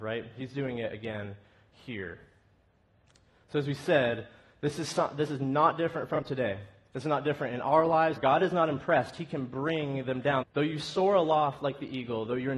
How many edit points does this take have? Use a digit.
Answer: 2